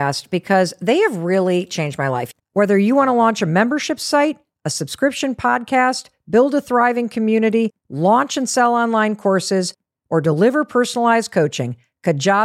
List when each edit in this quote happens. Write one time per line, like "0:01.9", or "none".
0:02.4